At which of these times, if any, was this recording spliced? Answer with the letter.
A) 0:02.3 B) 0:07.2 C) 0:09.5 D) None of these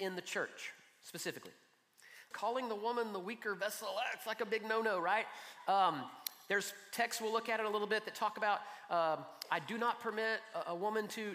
A